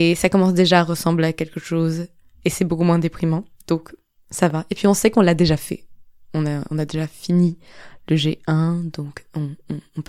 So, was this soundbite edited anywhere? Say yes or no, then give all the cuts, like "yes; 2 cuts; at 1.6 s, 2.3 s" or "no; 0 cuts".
no; 0 cuts